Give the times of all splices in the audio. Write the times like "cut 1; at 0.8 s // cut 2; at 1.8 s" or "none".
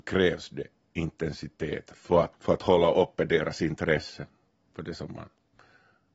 cut 1; at 2.3 s